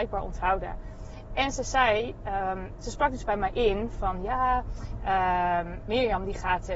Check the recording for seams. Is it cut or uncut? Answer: uncut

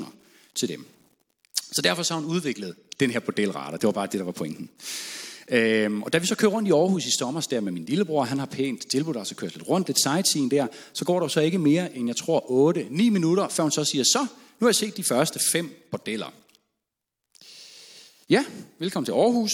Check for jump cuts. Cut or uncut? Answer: uncut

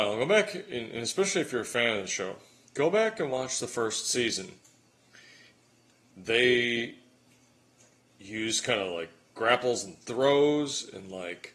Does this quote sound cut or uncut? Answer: cut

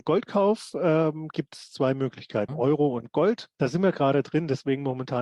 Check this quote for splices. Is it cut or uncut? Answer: cut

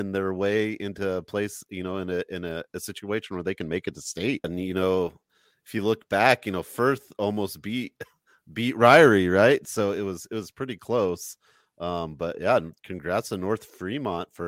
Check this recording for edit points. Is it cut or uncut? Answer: cut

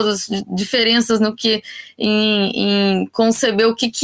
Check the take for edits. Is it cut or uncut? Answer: uncut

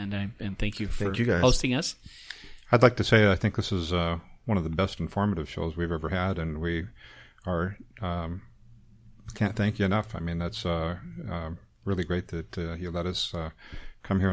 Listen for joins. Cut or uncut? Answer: uncut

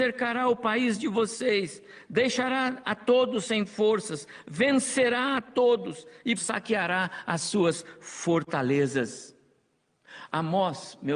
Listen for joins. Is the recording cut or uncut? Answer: cut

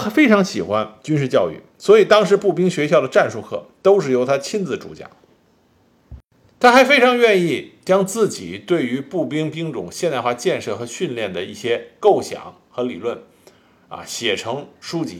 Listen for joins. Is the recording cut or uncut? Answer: uncut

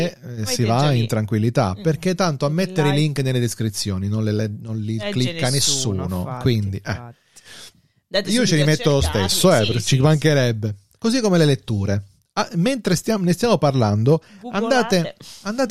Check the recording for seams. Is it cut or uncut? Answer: uncut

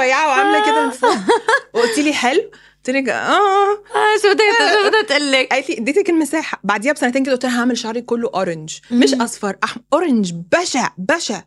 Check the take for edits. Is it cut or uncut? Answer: uncut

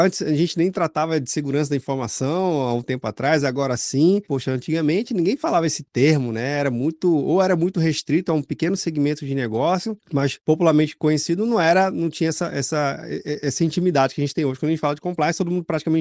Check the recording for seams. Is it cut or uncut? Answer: cut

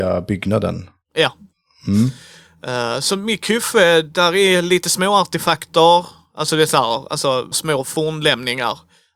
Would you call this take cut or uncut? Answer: cut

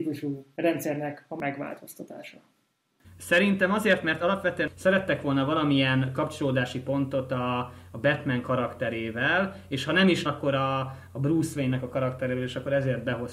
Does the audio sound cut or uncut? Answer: cut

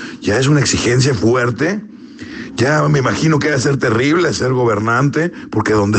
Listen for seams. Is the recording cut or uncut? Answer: uncut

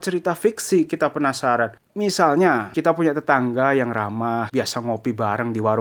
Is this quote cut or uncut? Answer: cut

